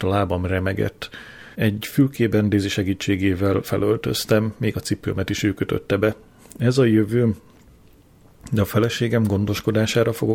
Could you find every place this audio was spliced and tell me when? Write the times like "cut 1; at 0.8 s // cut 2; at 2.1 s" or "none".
cut 1; at 1.5 s

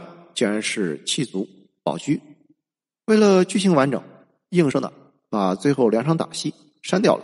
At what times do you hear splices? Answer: cut 1; at 4.7 s

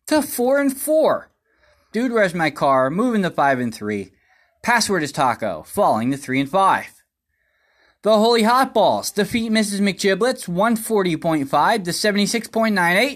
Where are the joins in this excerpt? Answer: cut 1; at 1.9 s

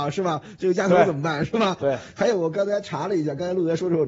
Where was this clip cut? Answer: cut 1; at 1.8 s

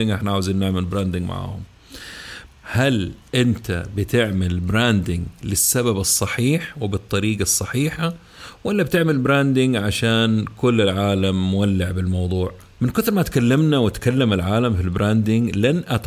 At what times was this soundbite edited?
cut 1; at 2.5 s // cut 2; at 12.8 s

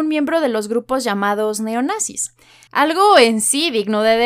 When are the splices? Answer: cut 1; at 2.7 s

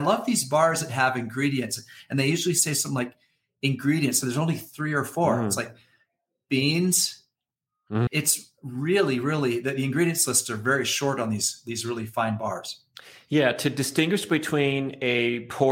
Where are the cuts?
cut 1; at 8.1 s

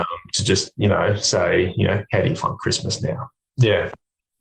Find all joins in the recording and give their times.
cut 1; at 3.5 s

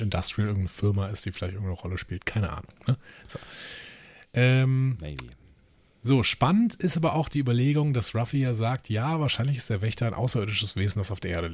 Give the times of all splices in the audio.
none

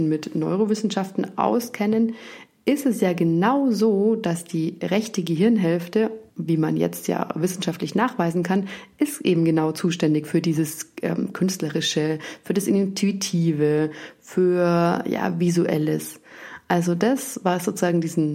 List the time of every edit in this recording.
cut 1; at 6.3 s

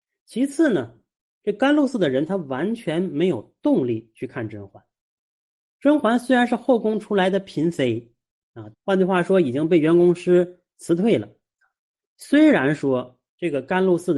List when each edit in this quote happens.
cut 1; at 8.7 s

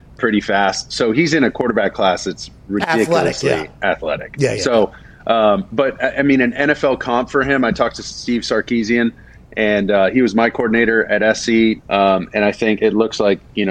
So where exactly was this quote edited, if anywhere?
cut 1; at 11.8 s // cut 2; at 12.8 s

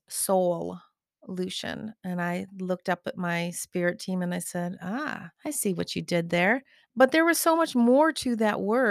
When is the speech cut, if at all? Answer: cut 1; at 5.3 s // cut 2; at 6.9 s

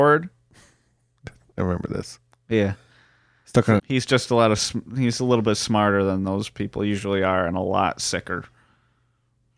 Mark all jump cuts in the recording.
cut 1; at 3.8 s

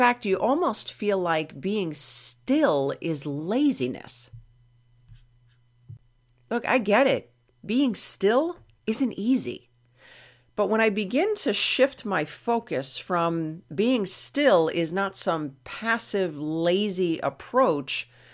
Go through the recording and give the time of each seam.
none

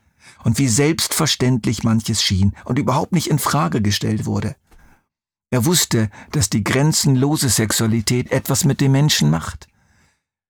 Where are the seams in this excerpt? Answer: none

